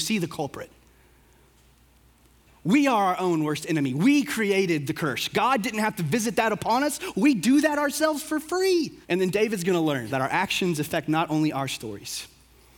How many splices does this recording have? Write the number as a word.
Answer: two